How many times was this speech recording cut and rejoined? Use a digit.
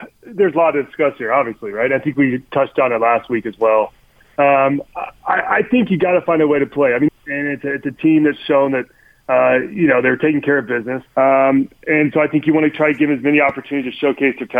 2